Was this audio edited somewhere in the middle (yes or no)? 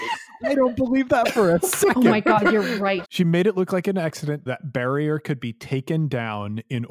yes